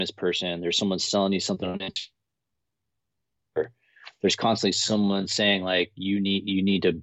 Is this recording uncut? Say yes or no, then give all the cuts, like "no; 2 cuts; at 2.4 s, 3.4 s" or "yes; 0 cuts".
yes; 0 cuts